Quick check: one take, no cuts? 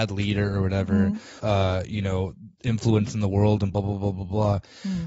no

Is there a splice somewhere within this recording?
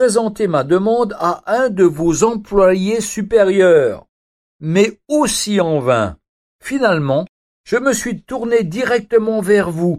no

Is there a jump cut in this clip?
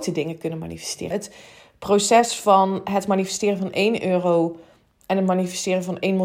yes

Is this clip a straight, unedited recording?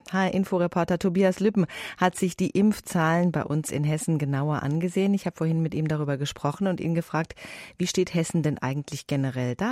yes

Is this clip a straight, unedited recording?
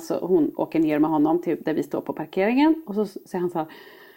yes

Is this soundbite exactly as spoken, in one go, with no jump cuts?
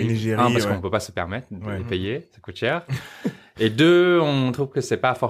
yes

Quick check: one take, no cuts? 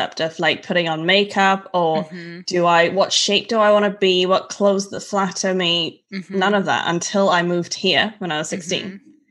yes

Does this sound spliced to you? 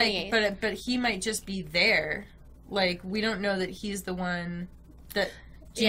no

